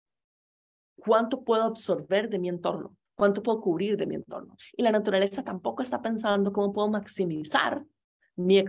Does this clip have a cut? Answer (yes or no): yes